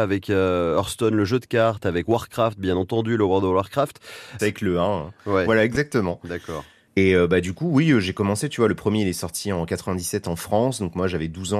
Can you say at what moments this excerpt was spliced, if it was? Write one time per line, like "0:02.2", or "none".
0:04.4